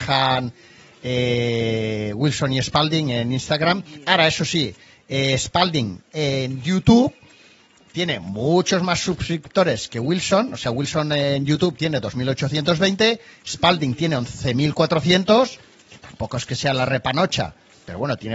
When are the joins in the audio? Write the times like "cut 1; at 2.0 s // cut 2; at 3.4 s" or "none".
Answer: none